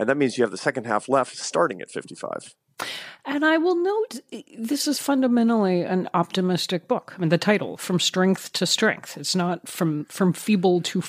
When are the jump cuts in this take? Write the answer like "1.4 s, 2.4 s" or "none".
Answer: none